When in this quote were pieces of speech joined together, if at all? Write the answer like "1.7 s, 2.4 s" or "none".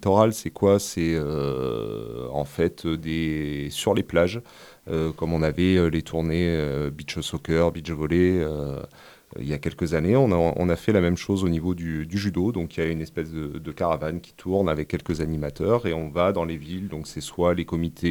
none